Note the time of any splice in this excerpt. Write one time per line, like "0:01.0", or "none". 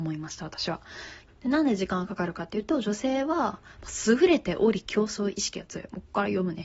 0:01.3